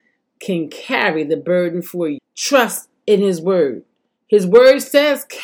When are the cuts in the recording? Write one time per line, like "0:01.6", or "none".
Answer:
0:02.2